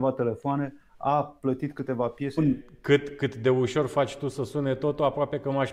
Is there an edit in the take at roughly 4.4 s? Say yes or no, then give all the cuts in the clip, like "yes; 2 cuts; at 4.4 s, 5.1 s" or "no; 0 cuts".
no; 1 cut; at 2.4 s